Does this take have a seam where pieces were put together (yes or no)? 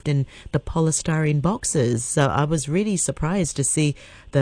no